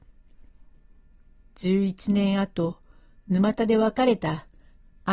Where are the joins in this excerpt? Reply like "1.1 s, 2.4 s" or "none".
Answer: none